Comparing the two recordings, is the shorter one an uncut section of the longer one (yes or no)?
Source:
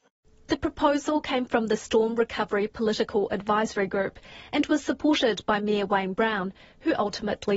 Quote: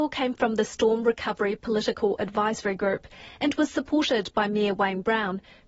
yes